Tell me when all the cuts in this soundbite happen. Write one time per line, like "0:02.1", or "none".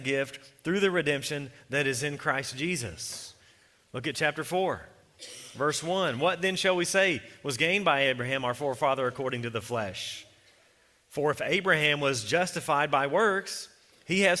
none